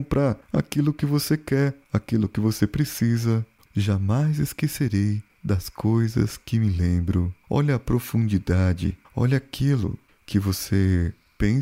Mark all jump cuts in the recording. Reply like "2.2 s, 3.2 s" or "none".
3.6 s, 7.4 s